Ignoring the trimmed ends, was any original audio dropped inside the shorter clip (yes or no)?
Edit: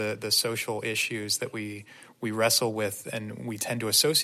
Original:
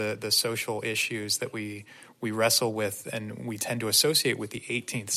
no